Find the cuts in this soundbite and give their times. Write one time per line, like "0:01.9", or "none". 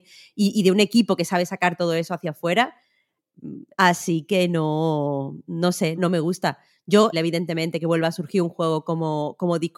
0:03.7
0:05.9
0:07.1